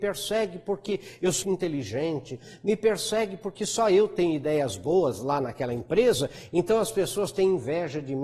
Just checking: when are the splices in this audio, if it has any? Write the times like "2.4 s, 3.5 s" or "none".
1.4 s